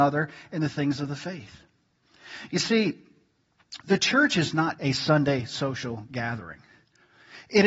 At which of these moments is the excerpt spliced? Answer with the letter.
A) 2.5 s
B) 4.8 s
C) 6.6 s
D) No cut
B